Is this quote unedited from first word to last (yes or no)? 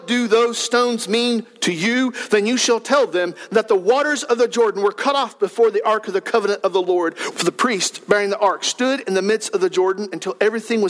no